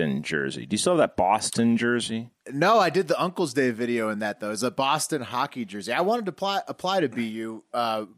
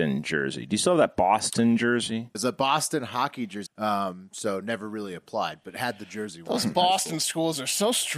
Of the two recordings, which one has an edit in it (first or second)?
second